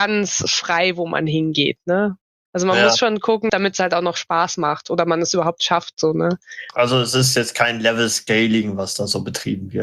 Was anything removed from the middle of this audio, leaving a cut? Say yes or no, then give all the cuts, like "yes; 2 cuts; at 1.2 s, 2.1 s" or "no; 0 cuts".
yes; 1 cut; at 3.5 s